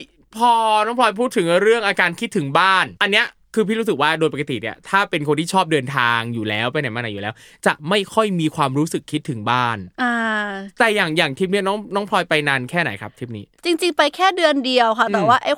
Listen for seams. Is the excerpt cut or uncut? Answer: cut